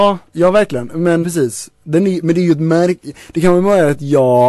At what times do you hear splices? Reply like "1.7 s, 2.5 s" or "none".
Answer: 1.2 s